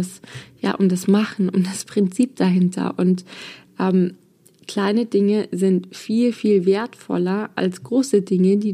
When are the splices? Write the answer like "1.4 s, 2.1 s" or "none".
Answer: none